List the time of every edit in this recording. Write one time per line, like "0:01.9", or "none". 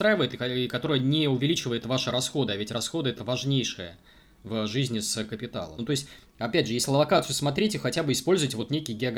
0:05.8